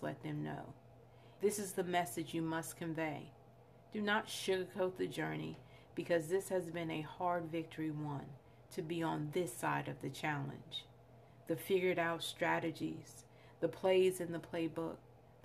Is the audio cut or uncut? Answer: cut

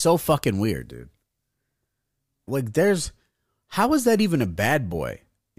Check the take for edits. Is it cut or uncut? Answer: cut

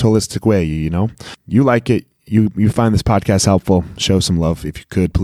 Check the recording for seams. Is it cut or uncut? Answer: uncut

